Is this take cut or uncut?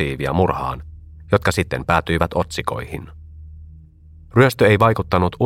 cut